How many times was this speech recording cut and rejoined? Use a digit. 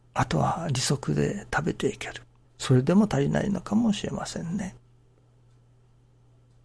1